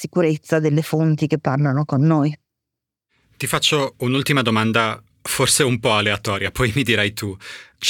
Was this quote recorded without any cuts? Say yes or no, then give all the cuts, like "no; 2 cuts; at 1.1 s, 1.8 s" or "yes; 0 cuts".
yes; 0 cuts